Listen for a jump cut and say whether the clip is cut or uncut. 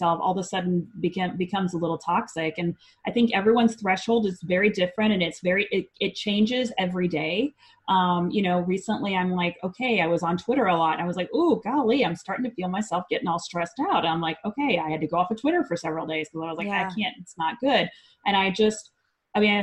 uncut